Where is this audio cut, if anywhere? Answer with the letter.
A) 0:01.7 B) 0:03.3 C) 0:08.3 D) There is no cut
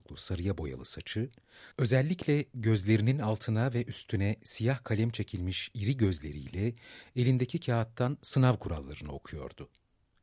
A